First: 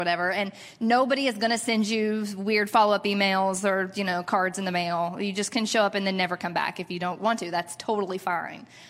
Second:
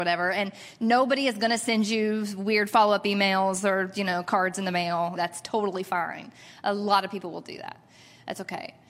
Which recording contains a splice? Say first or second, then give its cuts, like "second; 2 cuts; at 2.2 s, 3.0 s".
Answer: second; 1 cut; at 5.2 s